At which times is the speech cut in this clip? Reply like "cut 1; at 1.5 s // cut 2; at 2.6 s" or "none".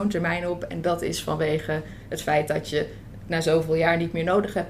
none